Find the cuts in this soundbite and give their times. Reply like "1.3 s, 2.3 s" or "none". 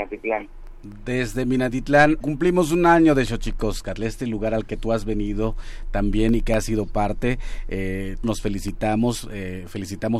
2.2 s, 8.2 s

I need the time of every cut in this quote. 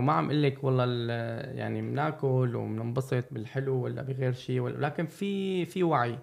none

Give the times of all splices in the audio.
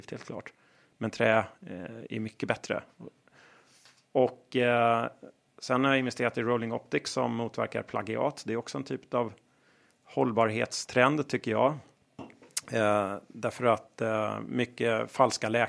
none

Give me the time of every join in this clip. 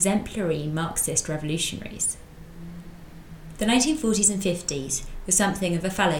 3.6 s

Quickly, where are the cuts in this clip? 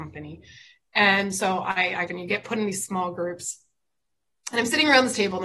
2.1 s

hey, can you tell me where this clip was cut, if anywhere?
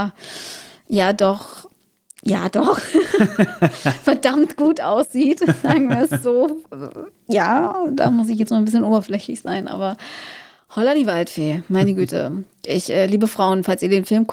none

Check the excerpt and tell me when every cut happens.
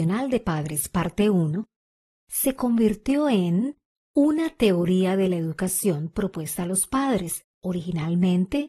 7.5 s

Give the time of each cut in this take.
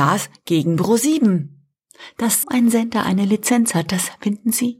2.4 s

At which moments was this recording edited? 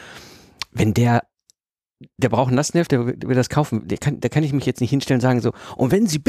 2.9 s

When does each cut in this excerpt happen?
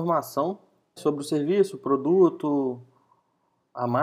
1.0 s

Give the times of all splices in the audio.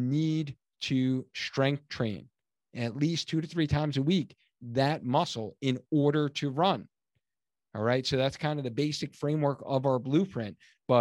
none

